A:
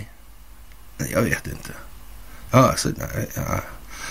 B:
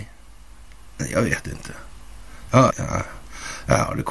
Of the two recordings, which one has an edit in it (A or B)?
B